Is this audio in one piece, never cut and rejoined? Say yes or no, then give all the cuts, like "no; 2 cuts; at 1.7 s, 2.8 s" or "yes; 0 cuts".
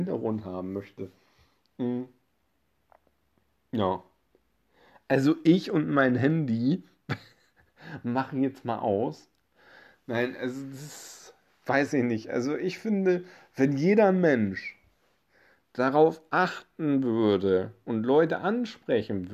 yes; 0 cuts